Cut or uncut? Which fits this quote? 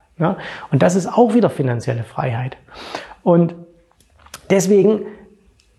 uncut